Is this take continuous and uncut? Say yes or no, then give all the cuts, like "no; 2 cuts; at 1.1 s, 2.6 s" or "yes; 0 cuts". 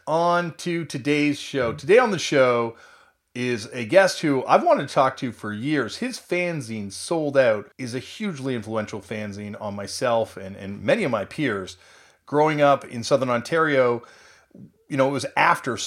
no; 1 cut; at 7.7 s